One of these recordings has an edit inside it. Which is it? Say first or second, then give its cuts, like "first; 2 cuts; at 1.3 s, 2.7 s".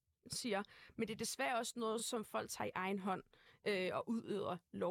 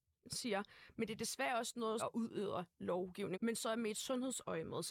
second; 2 cuts; at 2.0 s, 3.3 s